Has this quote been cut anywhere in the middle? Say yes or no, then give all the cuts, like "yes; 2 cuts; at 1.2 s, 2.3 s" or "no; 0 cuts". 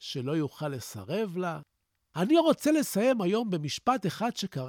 yes; 1 cut; at 2.0 s